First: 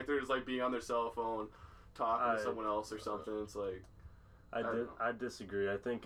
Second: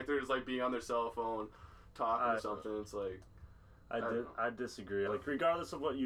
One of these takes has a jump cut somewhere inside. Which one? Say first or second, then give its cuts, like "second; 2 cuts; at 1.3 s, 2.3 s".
second; 2 cuts; at 2.4 s, 5.1 s